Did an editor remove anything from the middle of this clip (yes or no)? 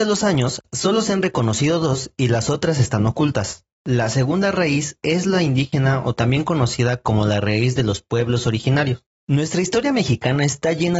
yes